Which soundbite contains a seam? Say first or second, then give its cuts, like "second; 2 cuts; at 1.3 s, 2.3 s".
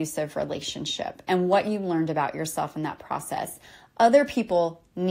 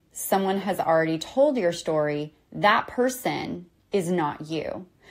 second; 1 cut; at 2.4 s